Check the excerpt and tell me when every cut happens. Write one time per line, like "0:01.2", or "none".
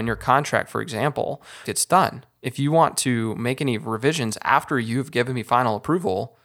0:01.6